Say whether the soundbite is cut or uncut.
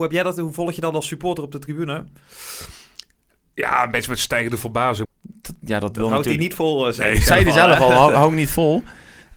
cut